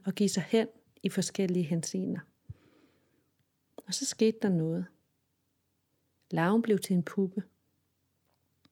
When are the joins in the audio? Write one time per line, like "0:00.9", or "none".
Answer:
none

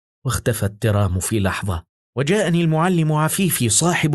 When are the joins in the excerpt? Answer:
0:02.0

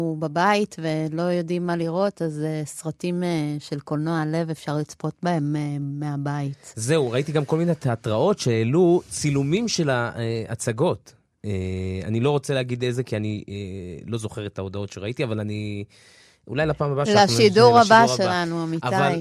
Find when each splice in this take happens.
none

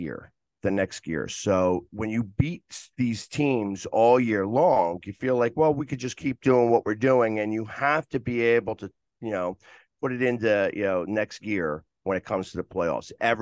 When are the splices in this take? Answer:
none

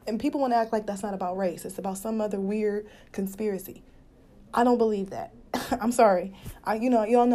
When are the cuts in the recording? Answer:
none

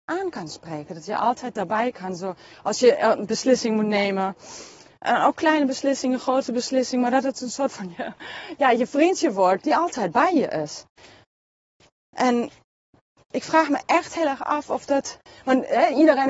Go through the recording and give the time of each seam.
0:09.6

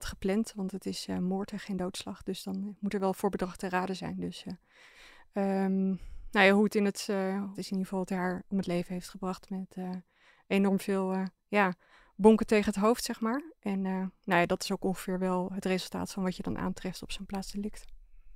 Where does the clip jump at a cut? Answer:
0:07.5

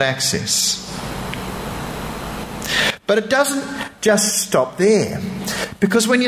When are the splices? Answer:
none

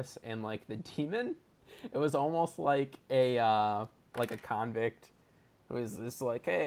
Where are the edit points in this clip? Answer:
0:04.1

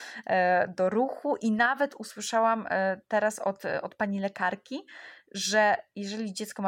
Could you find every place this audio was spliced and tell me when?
none

